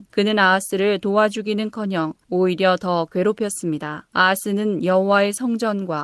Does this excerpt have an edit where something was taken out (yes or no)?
no